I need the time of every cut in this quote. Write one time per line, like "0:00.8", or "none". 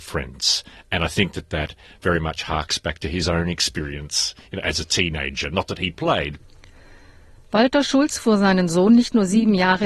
none